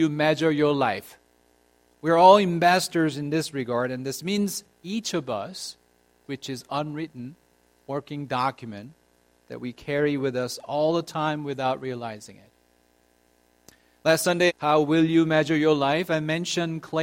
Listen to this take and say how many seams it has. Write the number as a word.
three